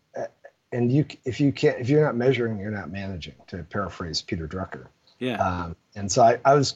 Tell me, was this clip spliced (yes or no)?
no